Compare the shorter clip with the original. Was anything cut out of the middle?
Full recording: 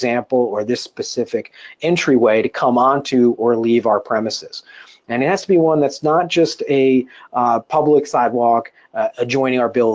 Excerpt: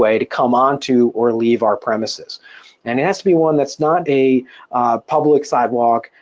yes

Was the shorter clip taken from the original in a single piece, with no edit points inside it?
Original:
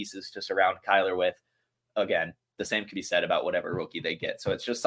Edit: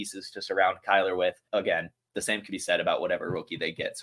no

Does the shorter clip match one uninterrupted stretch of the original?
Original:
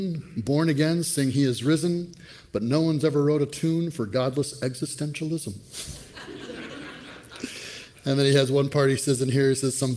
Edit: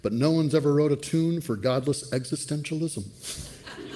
yes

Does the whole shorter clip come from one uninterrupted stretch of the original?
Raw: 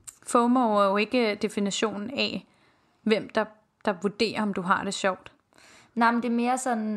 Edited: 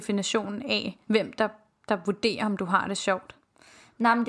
no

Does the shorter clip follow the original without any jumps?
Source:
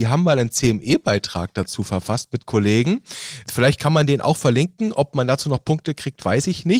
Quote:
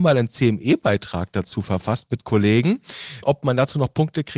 no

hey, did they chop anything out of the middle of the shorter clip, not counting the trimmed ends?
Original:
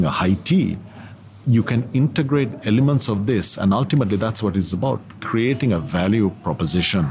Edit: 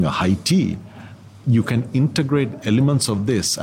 no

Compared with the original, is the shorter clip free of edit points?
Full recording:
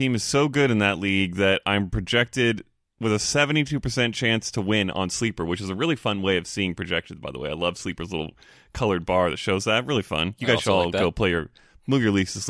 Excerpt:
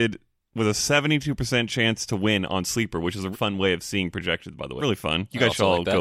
no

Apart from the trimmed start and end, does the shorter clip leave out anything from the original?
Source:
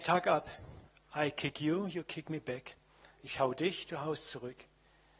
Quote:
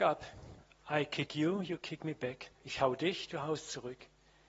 yes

